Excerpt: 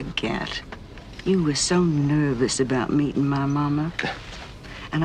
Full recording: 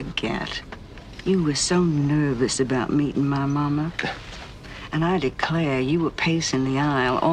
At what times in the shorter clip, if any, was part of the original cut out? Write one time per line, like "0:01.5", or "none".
none